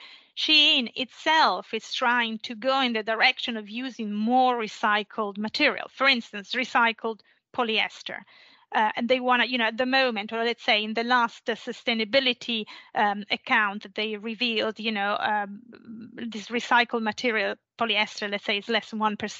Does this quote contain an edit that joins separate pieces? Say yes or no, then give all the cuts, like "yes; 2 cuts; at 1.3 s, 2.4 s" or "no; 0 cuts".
no; 0 cuts